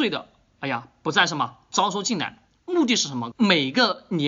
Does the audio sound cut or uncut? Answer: cut